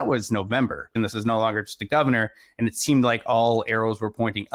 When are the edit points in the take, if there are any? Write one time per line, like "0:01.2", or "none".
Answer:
0:01.0